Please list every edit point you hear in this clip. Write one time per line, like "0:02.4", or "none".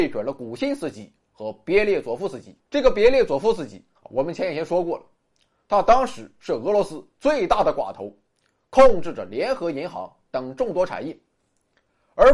0:02.6